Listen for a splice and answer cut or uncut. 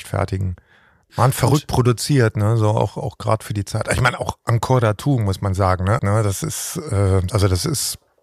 cut